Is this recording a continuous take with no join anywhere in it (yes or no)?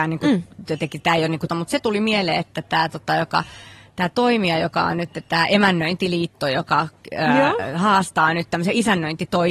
no